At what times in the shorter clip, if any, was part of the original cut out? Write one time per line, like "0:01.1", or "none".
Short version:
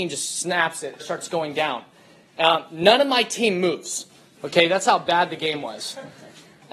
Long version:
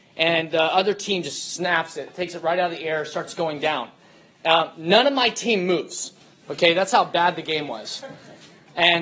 0:01.0